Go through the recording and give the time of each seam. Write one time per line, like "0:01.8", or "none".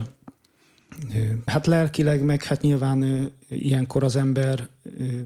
0:01.5
0:03.4